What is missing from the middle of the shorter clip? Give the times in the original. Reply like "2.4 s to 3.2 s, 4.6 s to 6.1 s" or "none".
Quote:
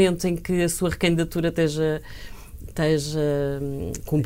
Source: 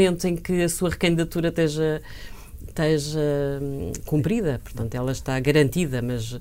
none